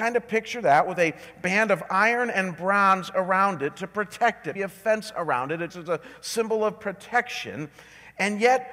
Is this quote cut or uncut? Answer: cut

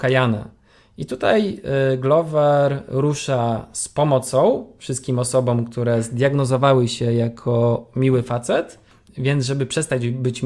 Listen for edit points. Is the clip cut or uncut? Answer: cut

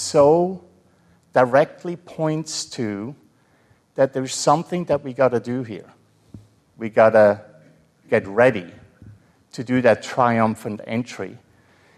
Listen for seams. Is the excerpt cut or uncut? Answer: cut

